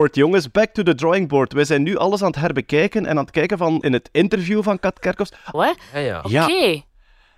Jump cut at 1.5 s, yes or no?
no